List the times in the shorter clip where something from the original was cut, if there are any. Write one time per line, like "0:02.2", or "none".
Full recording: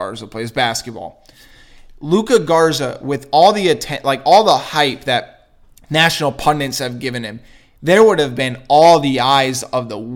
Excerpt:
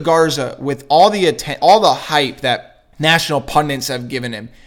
0:01.6
0:02.9